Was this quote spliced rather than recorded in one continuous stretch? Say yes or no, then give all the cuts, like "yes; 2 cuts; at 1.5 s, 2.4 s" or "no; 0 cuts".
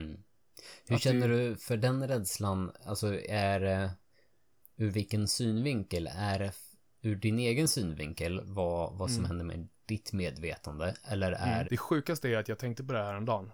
yes; 1 cut; at 11.6 s